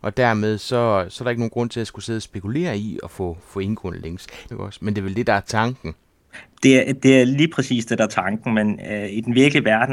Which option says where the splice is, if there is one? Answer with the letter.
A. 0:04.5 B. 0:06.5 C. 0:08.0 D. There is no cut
A